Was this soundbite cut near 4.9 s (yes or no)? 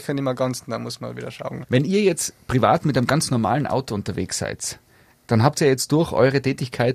no